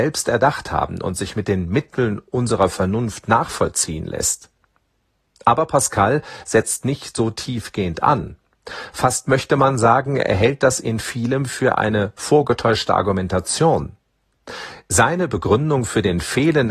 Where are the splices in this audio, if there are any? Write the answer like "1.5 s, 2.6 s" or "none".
none